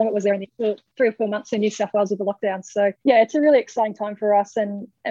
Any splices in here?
yes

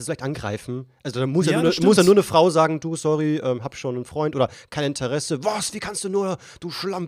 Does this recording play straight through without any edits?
yes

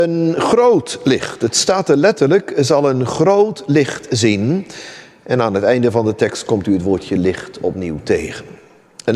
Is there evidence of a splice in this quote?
no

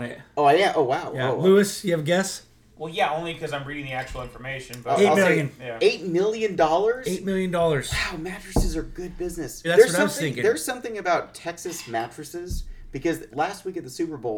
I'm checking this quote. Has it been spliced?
yes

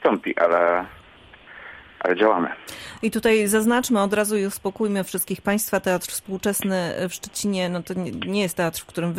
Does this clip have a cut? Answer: no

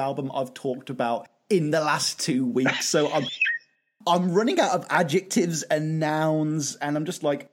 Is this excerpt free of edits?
yes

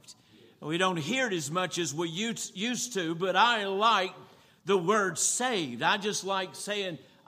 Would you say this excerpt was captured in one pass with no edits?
yes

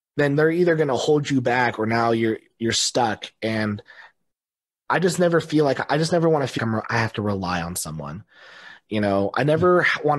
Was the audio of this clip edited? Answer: yes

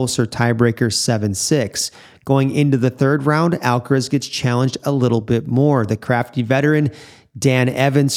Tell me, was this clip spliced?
no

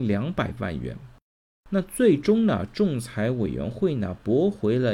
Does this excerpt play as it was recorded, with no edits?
no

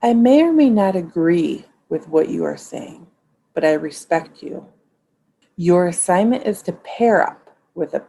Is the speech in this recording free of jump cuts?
no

